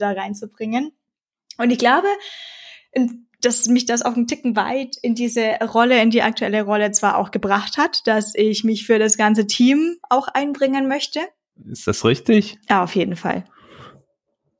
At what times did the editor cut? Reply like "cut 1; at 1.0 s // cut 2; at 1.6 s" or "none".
cut 1; at 11.5 s